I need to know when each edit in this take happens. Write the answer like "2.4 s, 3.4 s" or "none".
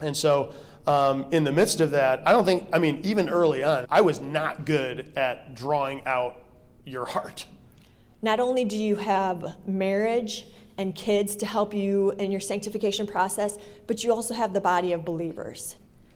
3.8 s, 8.1 s